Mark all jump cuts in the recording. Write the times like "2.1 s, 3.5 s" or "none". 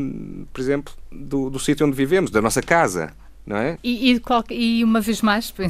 3.8 s